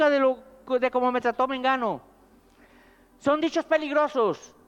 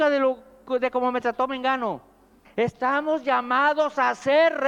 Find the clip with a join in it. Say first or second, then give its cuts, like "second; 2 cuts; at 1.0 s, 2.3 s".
second; 1 cut; at 2.4 s